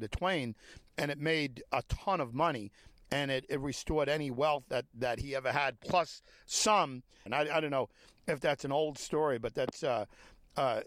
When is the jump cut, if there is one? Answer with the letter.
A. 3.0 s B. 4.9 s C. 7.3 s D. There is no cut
C